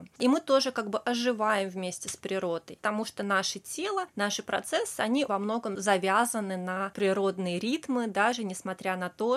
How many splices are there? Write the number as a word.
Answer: one